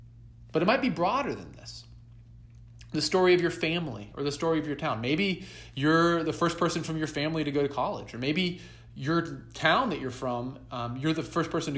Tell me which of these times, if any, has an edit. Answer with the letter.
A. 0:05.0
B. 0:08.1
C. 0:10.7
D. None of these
D